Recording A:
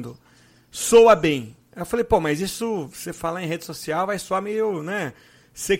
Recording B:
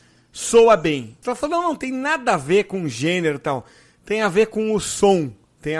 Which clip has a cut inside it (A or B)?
B